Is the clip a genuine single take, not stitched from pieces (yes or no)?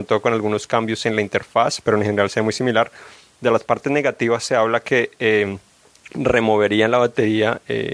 yes